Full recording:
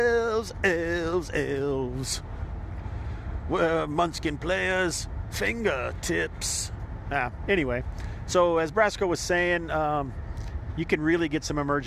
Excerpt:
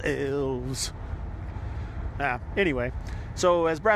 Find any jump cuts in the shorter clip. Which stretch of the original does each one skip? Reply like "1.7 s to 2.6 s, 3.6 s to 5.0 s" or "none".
3.4 s to 7.0 s